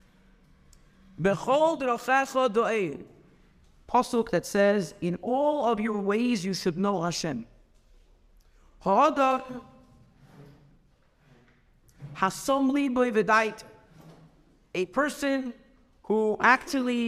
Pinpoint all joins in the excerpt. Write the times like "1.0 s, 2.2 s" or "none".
none

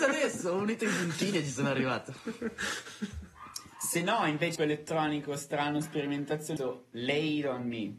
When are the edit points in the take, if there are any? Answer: 4.6 s, 6.6 s

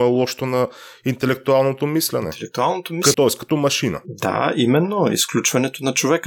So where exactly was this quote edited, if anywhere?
3.1 s

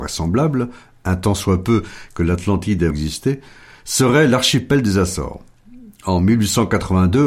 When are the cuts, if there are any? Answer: 2.9 s

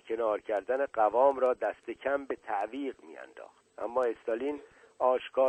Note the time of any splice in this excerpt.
3.7 s

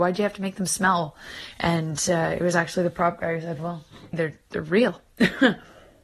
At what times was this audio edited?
4.1 s

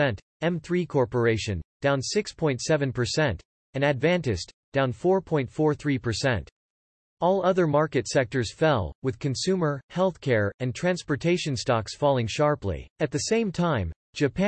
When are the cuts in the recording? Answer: 12.9 s

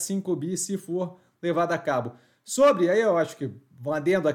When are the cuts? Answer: none

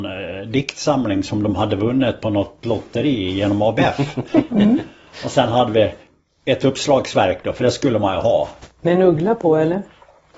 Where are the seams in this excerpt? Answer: 4.5 s

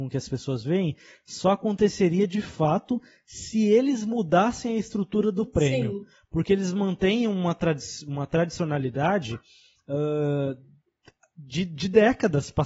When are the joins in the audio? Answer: none

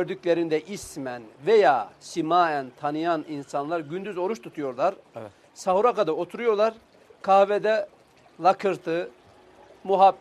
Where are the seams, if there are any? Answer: none

